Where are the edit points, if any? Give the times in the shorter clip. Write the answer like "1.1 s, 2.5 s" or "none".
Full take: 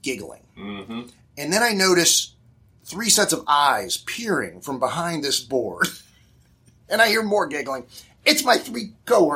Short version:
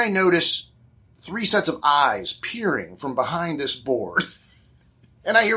none

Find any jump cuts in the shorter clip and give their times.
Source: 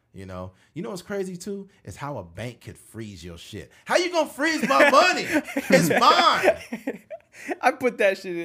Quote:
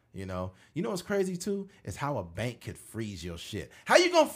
none

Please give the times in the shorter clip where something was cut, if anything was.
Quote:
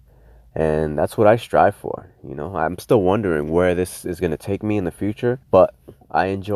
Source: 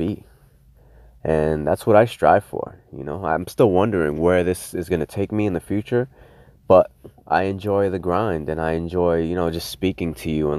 5.4 s

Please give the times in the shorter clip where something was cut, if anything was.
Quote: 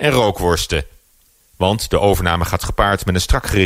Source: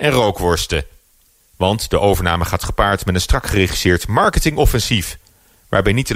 none

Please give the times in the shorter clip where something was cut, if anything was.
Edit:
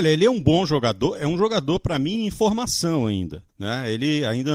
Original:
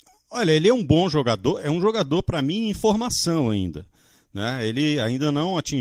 3.5 s

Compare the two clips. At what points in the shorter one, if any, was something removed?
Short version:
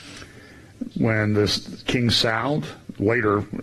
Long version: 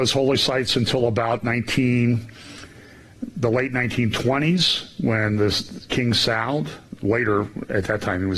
0.9 s

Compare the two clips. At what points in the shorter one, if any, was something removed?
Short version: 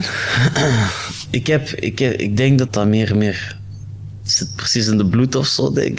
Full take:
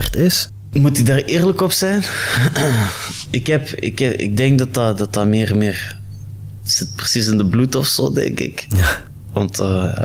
2.7 s

